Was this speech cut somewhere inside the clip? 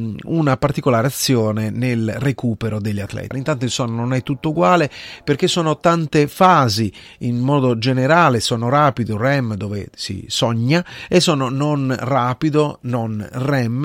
yes; 1 cut; at 3.3 s

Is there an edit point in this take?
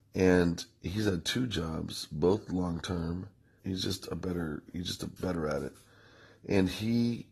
yes; 1 cut; at 3.6 s

